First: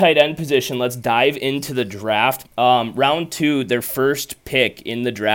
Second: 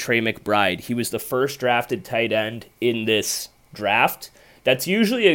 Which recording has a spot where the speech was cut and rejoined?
first; 1 cut; at 2.4 s

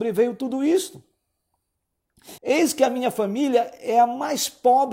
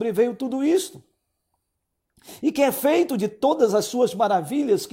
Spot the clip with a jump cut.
first; 1 cut; at 2.4 s

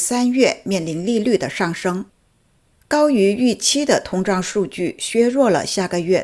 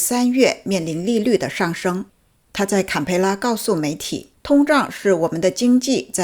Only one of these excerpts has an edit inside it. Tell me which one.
second; 2 cuts; at 2.4 s, 4.3 s

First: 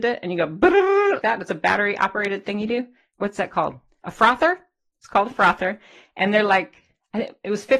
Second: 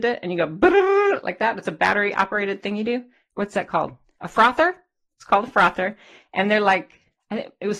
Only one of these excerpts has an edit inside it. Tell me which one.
first; 1 cut; at 1.2 s

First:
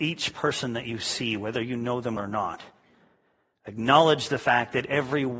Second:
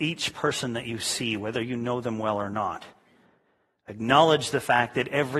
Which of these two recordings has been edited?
first; 1 cut; at 2.2 s

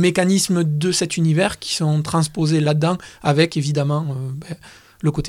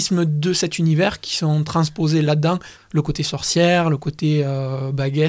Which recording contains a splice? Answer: second; 1 cut; at 2.8 s

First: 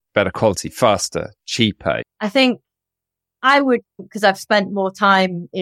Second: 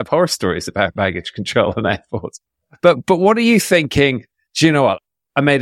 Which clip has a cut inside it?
first; 2 cuts; at 2.0 s, 4.0 s

